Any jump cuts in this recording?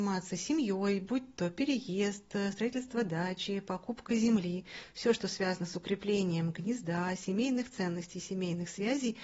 no; 0 cuts

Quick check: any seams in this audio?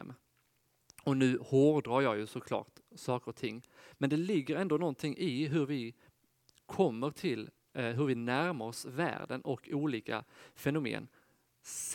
no; 0 cuts

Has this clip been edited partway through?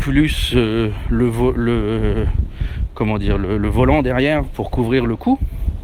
no; 0 cuts

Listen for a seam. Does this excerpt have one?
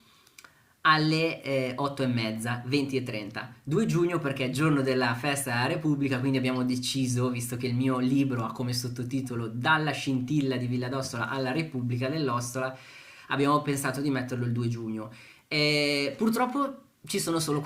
no; 0 cuts

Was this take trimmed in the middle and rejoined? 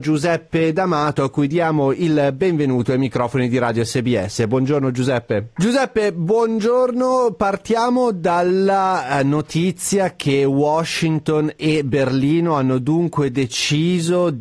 yes; 1 cut; at 5.6 s

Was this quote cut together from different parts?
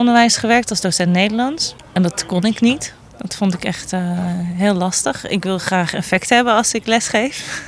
no; 0 cuts

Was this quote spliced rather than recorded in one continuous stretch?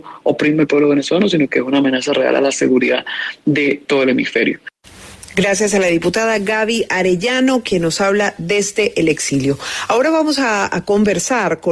no; 0 cuts

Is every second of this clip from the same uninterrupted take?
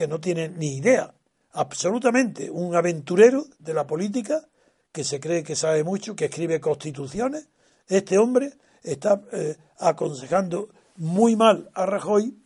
yes; 0 cuts

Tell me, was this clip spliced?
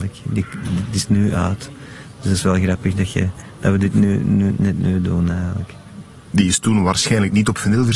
no; 0 cuts

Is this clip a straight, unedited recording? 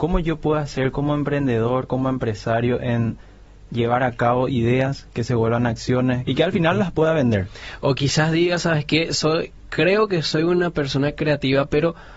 no; 1 cut; at 6.3 s

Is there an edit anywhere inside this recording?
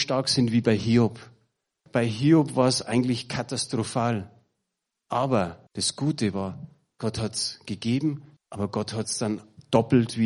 yes; 3 cuts; at 1.9 s, 5.7 s, 8.4 s

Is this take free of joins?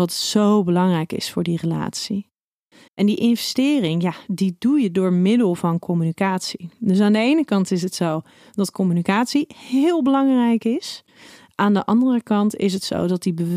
no; 1 cut; at 2.9 s

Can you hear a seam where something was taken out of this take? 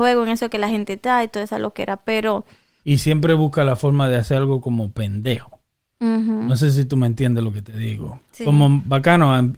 yes; 2 cuts; at 2.8 s, 8.3 s

